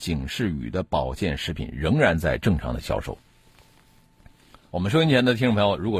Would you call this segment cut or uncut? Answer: cut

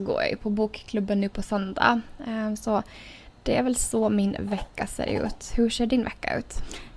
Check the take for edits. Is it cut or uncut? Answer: uncut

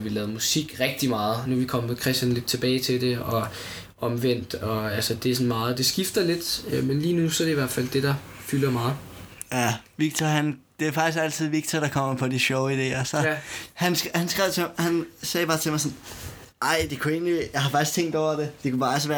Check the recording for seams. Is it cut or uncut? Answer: uncut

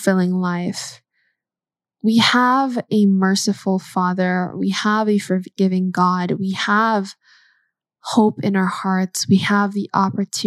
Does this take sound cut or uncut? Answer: uncut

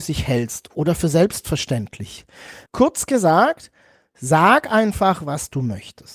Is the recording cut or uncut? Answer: cut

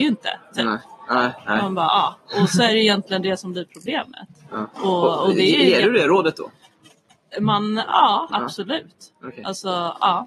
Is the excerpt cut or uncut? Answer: cut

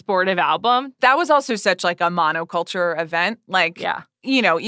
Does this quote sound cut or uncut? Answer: cut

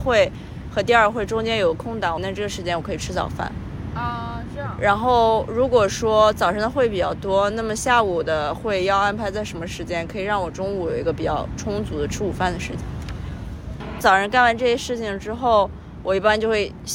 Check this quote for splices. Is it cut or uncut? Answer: cut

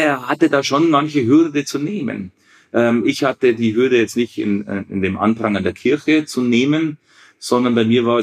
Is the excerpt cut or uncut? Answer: uncut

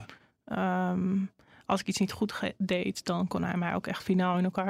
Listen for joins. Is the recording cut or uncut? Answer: uncut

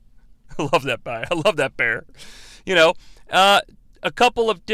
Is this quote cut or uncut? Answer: uncut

